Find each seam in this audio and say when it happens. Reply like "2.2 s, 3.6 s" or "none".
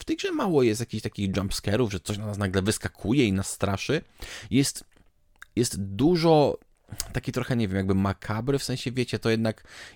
none